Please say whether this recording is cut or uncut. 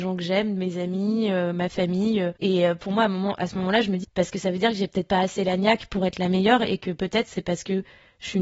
cut